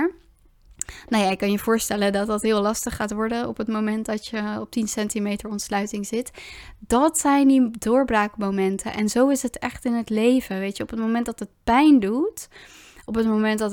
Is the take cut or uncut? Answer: uncut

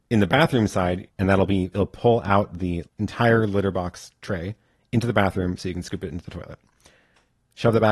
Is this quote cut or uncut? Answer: cut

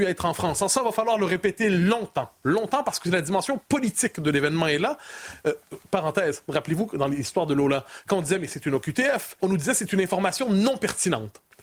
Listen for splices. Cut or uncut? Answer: cut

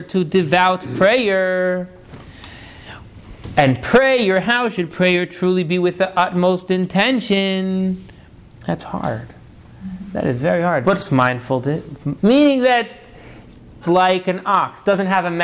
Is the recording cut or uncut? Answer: cut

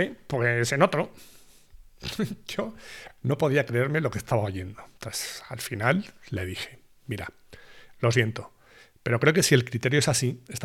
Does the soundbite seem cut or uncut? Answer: uncut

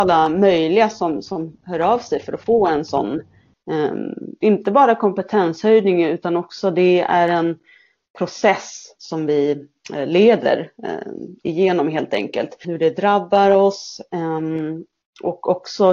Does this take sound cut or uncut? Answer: cut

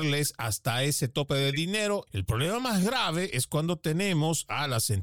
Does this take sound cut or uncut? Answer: cut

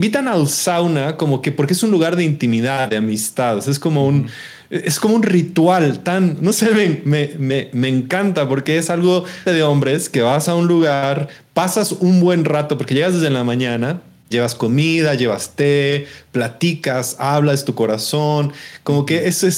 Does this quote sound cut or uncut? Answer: cut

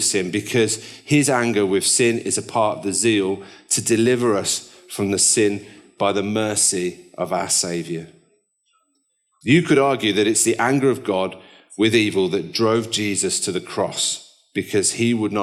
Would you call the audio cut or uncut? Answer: cut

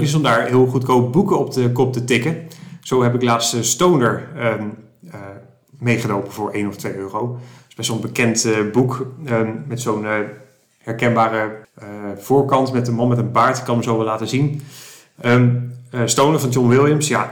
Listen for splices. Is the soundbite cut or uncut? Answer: uncut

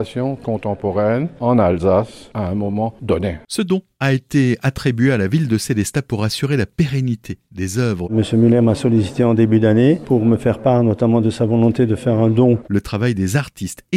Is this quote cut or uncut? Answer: cut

